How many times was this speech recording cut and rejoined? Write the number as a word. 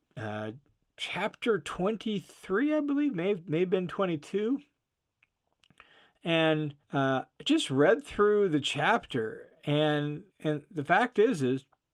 two